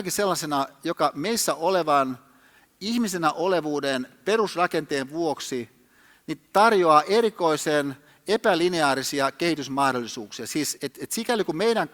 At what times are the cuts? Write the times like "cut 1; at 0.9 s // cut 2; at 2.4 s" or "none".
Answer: cut 1; at 10.8 s